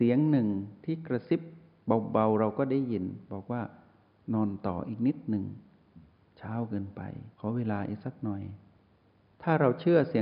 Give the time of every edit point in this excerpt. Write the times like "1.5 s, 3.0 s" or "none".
7.3 s

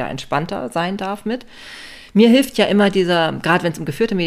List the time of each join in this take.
none

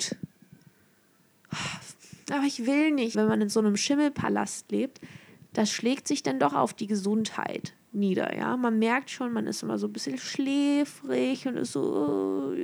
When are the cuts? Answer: 3.1 s

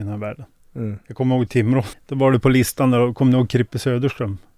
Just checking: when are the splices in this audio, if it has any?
1.9 s

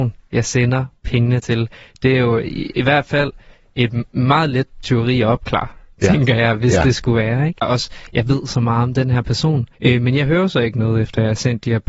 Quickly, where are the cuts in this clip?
7.6 s, 9.7 s

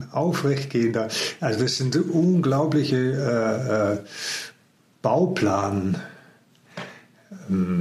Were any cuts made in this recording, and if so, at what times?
none

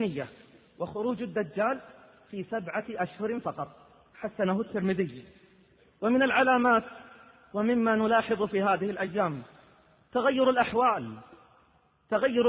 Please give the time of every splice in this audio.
none

